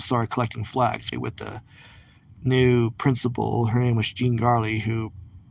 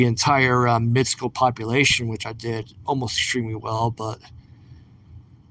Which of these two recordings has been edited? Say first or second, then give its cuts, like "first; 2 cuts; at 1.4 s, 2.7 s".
first; 1 cut; at 1.1 s